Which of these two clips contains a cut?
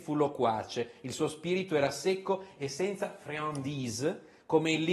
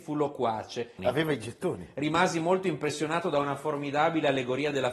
second; 1 cut; at 1.0 s

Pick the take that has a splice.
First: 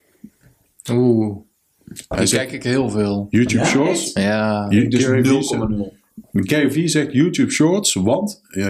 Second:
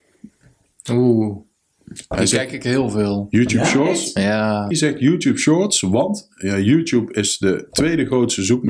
second; 1 cut; at 4.7 s

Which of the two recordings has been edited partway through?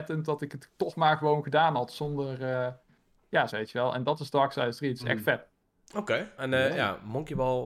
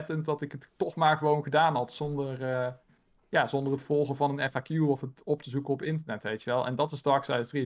first; 2 cuts; at 3.5 s, 6.4 s

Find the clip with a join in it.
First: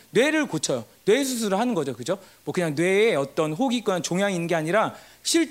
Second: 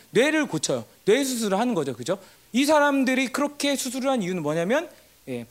second; 1 cut; at 2.4 s

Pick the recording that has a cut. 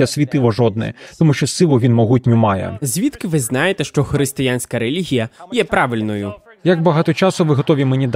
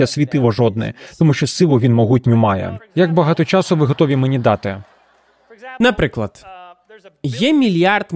second; 1 cut; at 2.8 s

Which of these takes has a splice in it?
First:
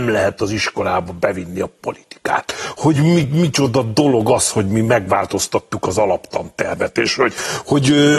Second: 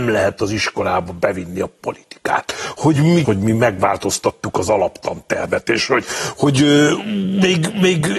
second; 1 cut; at 3.2 s

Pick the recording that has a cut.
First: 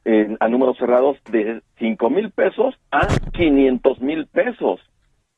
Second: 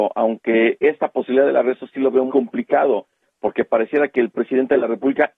second; 1 cut; at 2.3 s

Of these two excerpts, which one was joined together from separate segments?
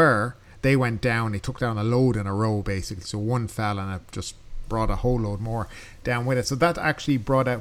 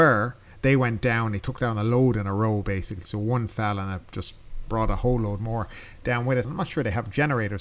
second; 1 cut; at 6.4 s

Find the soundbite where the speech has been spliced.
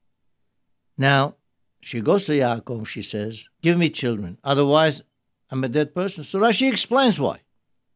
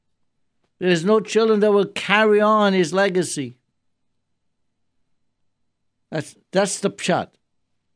first; 1 cut; at 3.5 s

